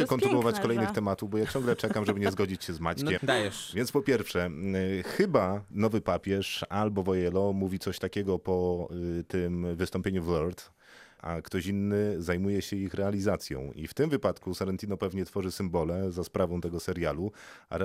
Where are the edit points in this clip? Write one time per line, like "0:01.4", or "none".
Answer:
0:03.2
0:11.2